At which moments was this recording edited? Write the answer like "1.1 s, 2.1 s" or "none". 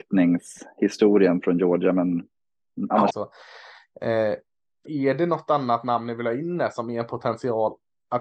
3.1 s, 4.8 s